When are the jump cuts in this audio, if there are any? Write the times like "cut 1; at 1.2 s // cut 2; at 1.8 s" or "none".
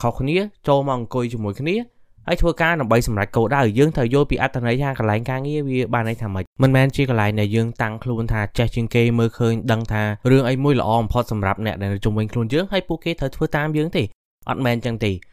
cut 1; at 6.5 s // cut 2; at 10.2 s